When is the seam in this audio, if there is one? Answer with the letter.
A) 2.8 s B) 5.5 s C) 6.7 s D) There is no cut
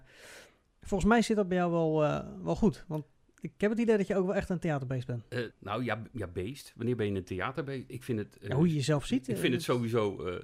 B